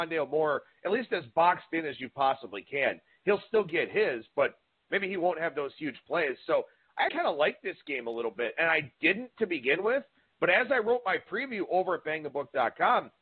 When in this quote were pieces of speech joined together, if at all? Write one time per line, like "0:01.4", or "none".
0:07.1